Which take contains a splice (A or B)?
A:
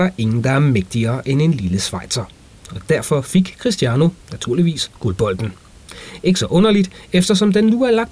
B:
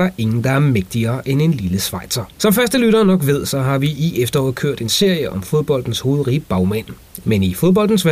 B